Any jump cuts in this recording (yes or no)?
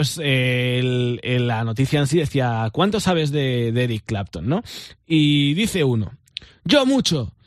no